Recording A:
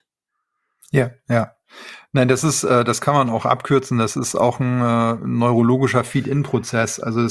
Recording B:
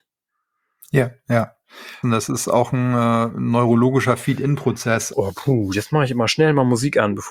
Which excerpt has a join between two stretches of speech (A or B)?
B